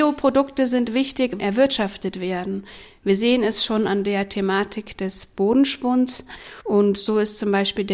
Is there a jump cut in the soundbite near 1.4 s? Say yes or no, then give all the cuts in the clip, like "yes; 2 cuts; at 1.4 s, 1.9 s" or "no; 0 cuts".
yes; 1 cut; at 1.4 s